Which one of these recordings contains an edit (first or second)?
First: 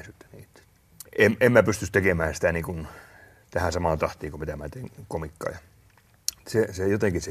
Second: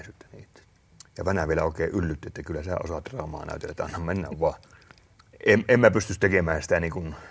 first